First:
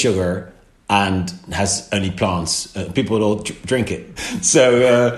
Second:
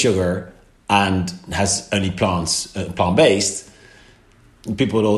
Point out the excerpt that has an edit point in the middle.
first; 2 cuts; at 2.9 s, 4.2 s

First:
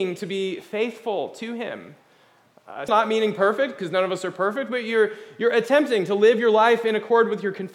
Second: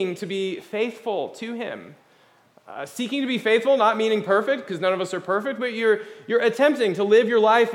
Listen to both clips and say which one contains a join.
first; 1 cut; at 2.9 s

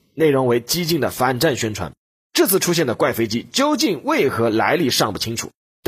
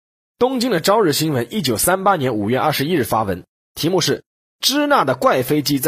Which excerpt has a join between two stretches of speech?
first; 1 cut; at 2.2 s

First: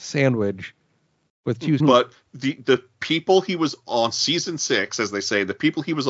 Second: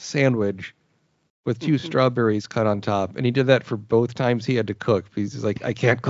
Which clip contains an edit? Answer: first; 1 cut; at 1.8 s

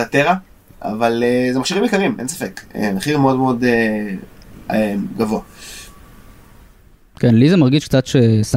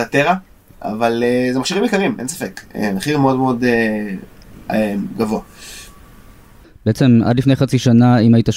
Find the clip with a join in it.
second; 1 cut; at 6.6 s

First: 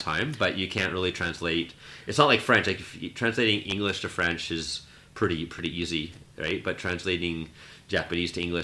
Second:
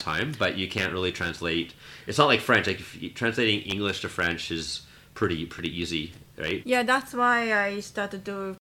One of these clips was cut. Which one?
second; 1 cut; at 6.6 s

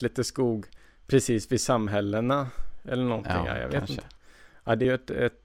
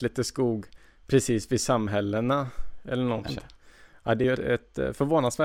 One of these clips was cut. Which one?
second; 2 cuts; at 3.3 s, 4.3 s

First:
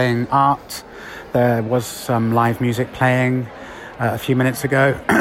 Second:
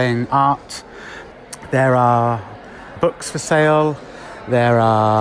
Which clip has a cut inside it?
second; 2 cuts; at 1.3 s, 3.0 s

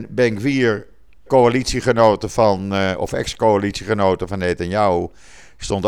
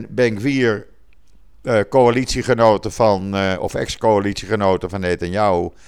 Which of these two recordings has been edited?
first; 1 cut; at 1.3 s

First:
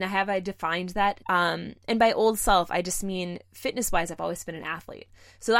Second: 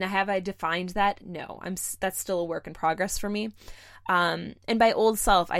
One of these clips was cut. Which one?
first; 1 cut; at 1.2 s

